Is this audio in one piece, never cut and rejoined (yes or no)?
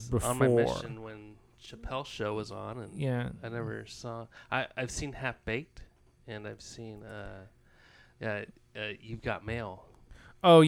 yes